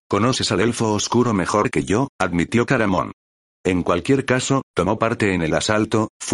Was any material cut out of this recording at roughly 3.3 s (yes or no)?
no